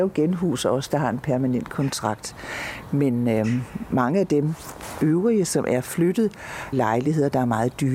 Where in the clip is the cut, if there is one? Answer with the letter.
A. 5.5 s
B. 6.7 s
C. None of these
B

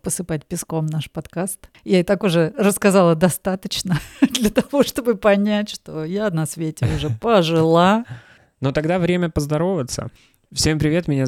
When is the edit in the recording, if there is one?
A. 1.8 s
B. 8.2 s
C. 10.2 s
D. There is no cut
D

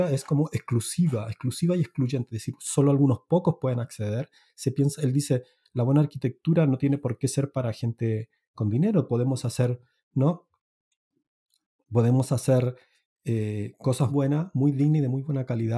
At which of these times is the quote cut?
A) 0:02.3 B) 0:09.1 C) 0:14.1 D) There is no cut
C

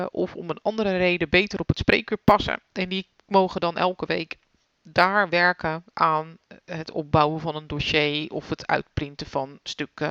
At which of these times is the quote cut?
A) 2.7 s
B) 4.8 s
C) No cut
C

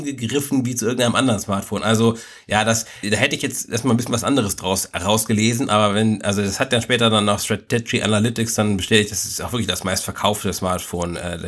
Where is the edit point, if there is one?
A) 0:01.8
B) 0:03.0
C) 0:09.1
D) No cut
B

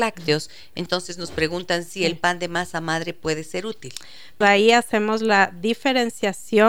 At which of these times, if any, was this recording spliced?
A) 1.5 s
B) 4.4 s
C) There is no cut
B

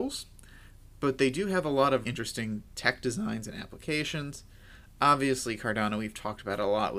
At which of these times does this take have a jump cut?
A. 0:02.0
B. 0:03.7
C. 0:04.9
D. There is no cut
A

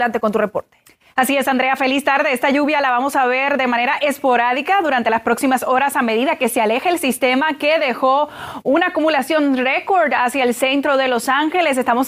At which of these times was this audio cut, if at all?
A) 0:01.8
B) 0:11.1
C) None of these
A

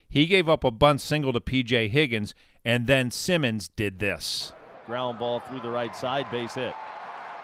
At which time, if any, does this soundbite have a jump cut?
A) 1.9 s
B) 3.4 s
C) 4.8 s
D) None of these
C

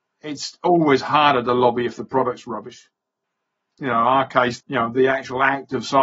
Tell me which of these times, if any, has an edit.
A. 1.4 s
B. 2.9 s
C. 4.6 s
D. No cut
C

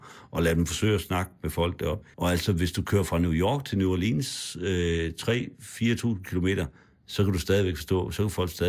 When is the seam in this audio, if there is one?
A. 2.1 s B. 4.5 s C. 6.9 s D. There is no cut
A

